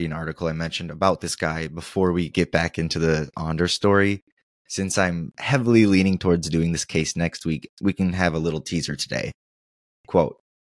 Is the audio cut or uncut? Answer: cut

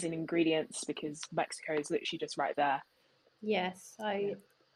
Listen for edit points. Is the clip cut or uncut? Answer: cut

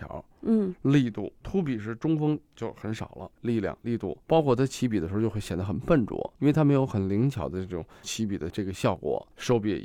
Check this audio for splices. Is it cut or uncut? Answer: cut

